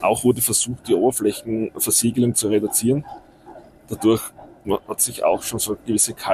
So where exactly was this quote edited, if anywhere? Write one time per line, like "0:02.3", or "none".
none